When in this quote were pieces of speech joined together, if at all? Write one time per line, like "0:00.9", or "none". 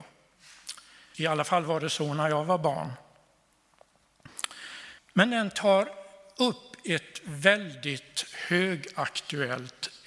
0:01.1
0:05.0